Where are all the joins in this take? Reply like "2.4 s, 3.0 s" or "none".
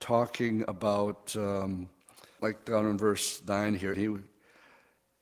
2.4 s, 3.9 s